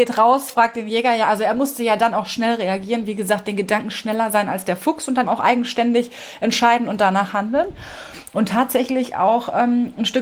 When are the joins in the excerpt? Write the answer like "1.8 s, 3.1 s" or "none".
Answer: 5.2 s